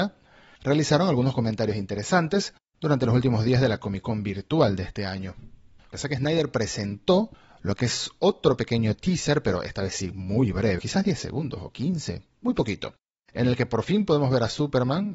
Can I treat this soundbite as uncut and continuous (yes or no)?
no